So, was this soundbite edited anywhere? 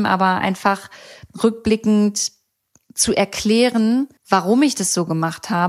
yes; 1 cut; at 4.2 s

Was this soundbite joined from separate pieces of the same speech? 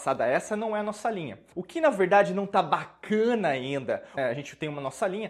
yes; 2 cuts; at 1.5 s, 4.2 s

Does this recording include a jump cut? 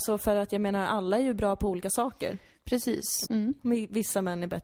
yes; 1 cut; at 3.2 s

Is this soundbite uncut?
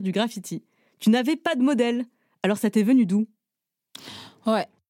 yes; 0 cuts

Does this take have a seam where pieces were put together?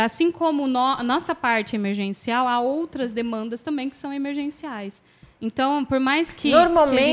no; 0 cuts

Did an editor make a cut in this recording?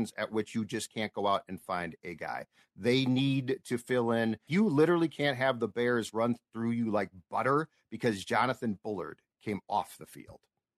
yes; 2 cuts; at 2.0 s, 4.5 s

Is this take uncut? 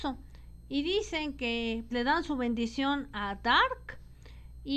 no; 1 cut; at 1.9 s

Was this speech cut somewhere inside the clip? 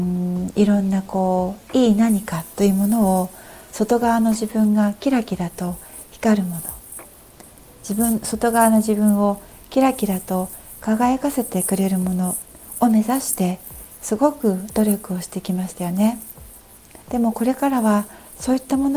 yes; 1 cut; at 17.0 s

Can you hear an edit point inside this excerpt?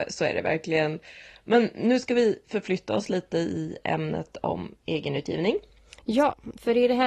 no; 0 cuts

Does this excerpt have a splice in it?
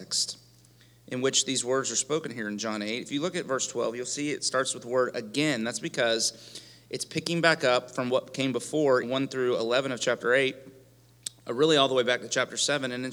yes; 1 cut; at 9.0 s

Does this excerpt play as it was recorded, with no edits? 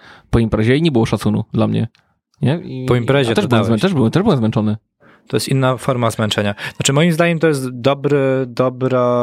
yes; 0 cuts

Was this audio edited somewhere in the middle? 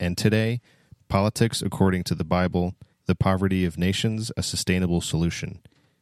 yes; 2 cuts; at 1.0 s, 2.9 s

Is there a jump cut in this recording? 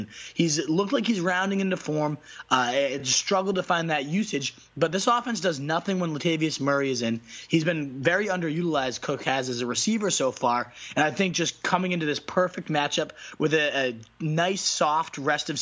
no; 0 cuts

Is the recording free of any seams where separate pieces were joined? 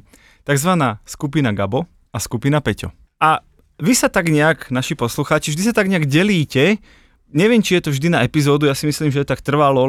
yes; 0 cuts

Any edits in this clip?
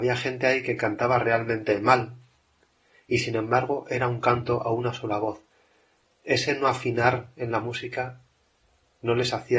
no; 0 cuts

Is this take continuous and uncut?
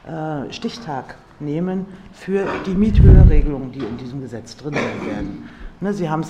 yes; 0 cuts

